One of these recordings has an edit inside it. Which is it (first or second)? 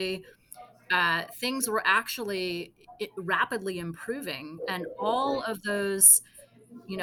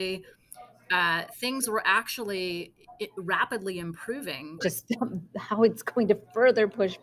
second